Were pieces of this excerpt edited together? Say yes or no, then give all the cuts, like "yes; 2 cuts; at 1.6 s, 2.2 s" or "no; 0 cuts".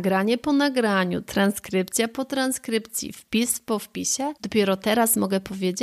yes; 1 cut; at 4.4 s